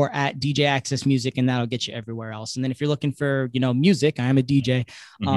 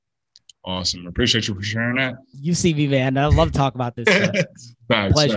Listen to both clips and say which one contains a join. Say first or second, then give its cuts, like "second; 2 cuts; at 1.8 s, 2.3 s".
second; 1 cut; at 2.3 s